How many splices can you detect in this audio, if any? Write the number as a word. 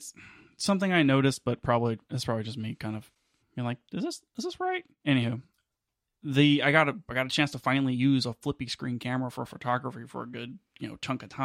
one